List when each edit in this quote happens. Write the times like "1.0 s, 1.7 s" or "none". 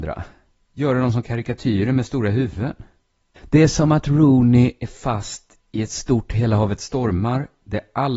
3.4 s